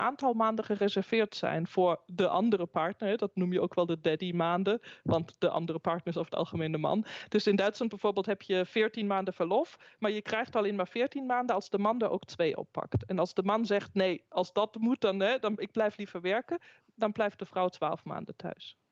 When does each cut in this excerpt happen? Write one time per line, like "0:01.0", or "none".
none